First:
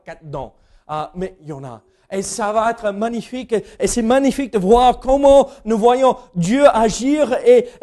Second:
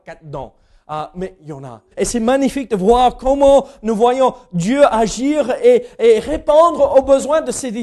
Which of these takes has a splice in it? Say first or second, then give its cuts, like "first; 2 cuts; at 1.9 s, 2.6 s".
second; 1 cut; at 1.9 s